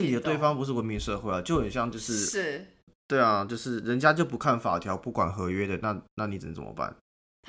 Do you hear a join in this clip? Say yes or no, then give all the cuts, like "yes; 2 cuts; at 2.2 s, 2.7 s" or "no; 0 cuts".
no; 0 cuts